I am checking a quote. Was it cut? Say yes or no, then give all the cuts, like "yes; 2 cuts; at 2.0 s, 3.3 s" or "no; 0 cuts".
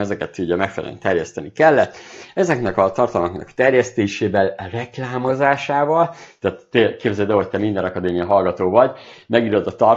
no; 0 cuts